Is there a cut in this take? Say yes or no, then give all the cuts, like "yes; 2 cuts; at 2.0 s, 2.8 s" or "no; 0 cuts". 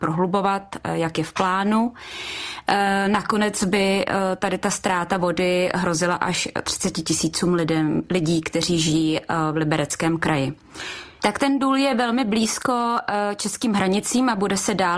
yes; 1 cut; at 11.2 s